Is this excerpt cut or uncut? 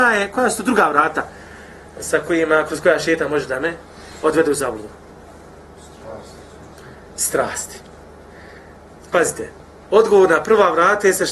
uncut